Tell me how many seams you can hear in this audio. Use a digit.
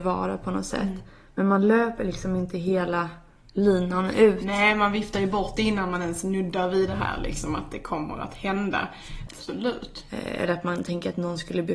1